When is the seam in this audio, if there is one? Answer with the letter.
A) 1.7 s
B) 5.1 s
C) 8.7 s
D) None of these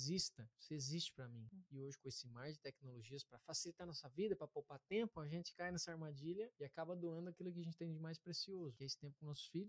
A